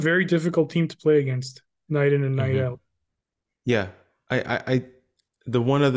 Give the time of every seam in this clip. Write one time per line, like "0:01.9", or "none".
none